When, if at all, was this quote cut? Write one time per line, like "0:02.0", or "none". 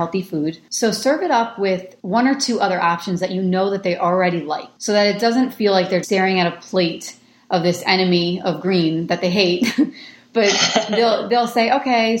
0:06.0